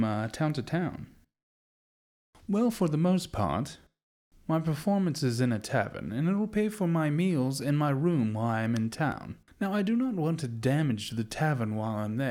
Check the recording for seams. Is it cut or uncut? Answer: uncut